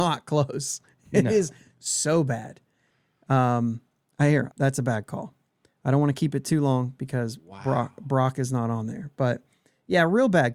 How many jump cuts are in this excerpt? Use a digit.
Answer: 1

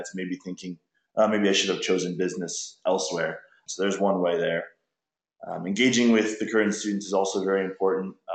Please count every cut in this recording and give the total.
1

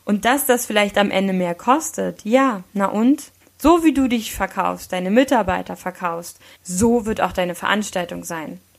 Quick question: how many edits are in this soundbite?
2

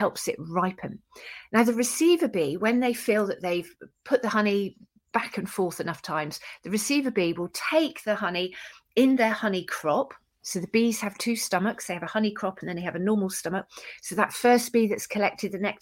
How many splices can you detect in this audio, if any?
0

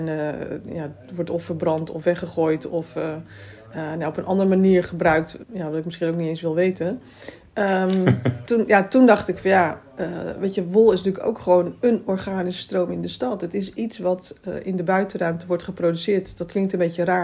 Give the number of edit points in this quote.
2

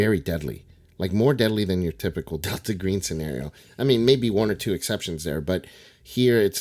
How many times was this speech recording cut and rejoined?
0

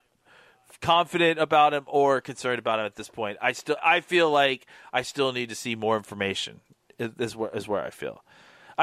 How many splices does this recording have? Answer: 1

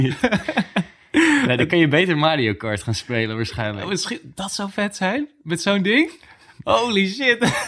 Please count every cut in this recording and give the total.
0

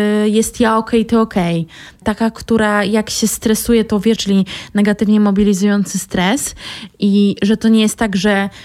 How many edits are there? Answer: 2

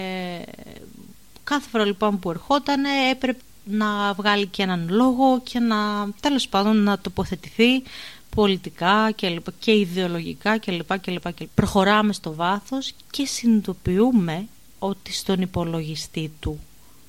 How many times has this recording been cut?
2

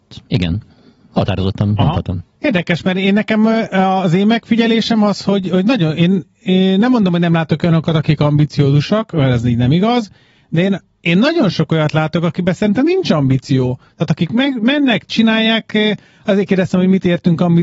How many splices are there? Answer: 0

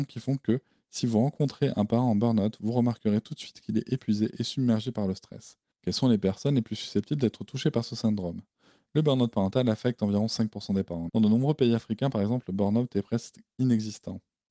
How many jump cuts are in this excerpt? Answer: 2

